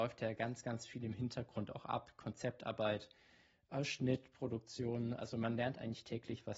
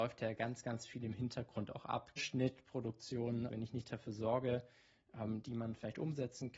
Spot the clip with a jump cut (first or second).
second